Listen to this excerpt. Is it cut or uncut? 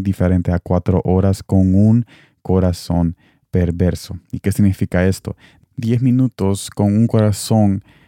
uncut